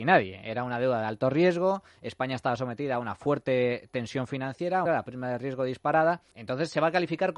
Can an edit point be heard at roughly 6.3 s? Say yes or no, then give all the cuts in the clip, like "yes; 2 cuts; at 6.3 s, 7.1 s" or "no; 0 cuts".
yes; 2 cuts; at 4.9 s, 6.3 s